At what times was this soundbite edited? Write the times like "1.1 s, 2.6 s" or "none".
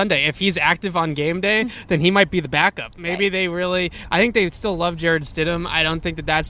none